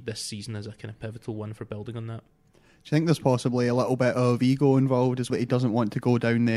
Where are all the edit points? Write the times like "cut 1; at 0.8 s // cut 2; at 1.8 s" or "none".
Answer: cut 1; at 5.3 s